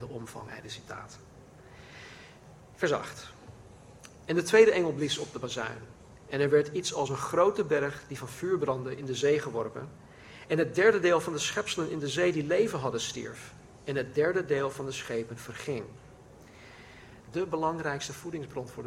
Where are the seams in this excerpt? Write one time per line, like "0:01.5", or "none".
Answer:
0:10.5
0:17.2